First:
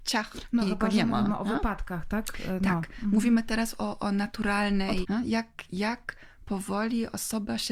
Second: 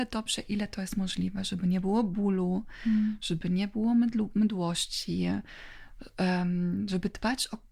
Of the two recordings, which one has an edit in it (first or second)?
first